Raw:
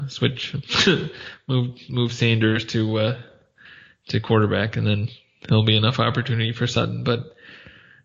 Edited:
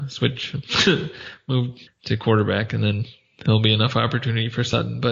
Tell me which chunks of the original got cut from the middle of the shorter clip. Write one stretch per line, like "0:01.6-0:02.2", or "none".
0:01.9-0:03.9